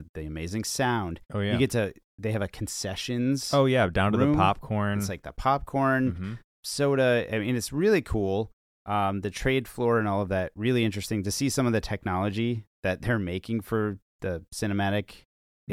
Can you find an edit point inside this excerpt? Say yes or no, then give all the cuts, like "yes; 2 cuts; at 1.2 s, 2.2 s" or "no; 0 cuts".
no; 0 cuts